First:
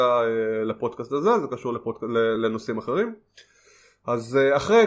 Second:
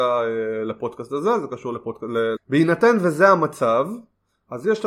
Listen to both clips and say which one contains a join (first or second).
second